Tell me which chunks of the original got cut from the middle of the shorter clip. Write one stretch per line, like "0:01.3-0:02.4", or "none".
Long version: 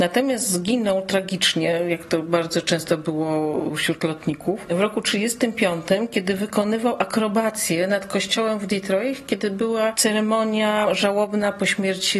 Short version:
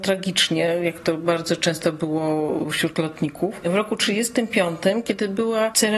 0:06.1-0:09.3